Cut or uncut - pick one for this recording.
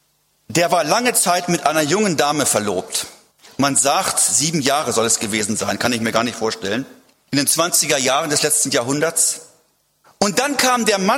cut